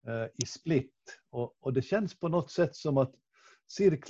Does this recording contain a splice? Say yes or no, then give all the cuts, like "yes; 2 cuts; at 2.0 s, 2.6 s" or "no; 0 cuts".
no; 0 cuts